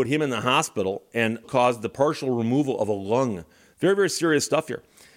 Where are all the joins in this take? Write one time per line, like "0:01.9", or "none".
0:01.4